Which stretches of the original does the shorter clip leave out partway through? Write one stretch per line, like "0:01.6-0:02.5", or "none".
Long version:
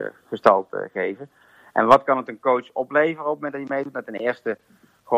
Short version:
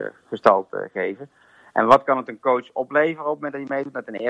none